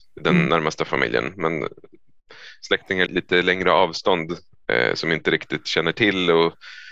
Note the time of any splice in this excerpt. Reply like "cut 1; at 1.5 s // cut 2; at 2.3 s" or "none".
cut 1; at 3.1 s